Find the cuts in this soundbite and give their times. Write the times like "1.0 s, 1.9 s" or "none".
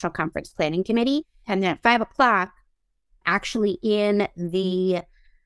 1.4 s